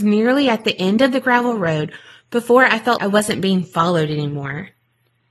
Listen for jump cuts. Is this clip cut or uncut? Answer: cut